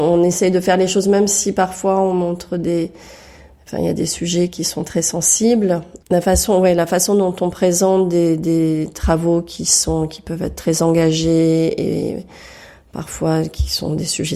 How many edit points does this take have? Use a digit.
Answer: 1